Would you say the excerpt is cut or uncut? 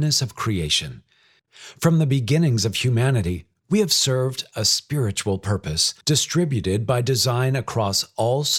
cut